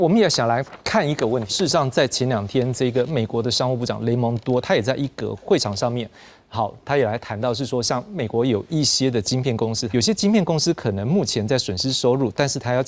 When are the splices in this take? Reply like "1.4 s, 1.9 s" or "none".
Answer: 1.5 s, 9.9 s